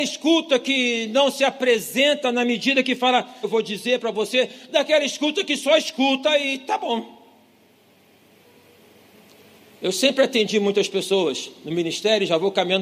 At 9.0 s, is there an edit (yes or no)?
no